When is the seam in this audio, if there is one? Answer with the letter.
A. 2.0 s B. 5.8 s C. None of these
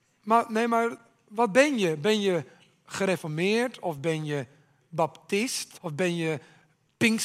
B